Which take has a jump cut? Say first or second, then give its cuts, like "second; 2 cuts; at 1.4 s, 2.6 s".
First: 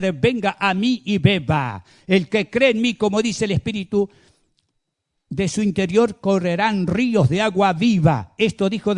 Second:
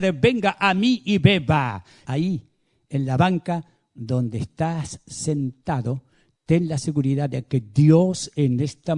second; 1 cut; at 2.1 s